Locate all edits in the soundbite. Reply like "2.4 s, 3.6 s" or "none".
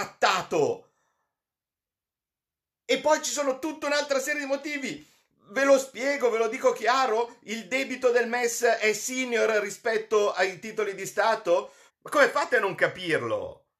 11.9 s